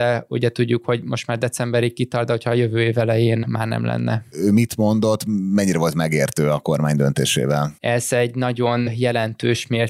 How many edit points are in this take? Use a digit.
2